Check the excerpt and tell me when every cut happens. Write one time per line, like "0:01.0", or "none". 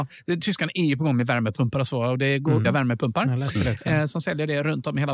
0:02.6